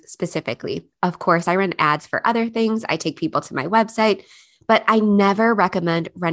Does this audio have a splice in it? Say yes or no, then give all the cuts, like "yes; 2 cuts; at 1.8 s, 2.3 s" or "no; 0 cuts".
no; 0 cuts